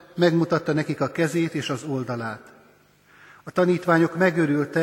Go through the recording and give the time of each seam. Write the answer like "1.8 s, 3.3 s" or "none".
none